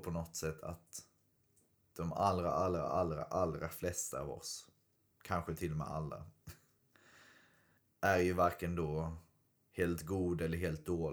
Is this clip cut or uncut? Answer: uncut